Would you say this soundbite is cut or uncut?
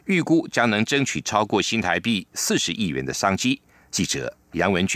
uncut